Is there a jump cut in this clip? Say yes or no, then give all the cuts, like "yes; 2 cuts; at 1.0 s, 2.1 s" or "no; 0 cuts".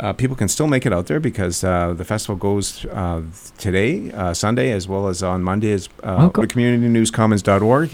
yes; 1 cut; at 6.4 s